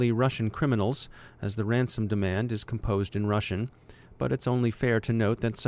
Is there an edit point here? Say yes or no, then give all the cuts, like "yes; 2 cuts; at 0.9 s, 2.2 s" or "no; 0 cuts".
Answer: no; 0 cuts